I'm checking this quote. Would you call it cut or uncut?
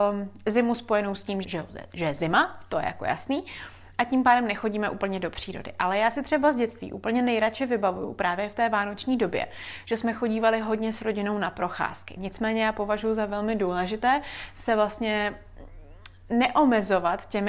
cut